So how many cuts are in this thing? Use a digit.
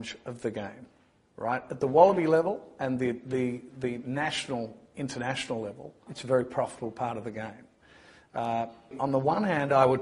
2